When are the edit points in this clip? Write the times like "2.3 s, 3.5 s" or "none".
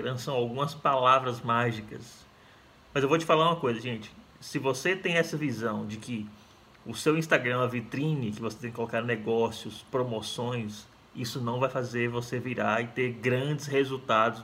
2.9 s